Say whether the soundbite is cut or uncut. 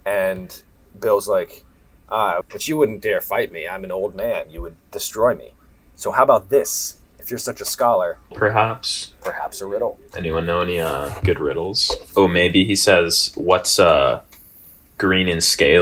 cut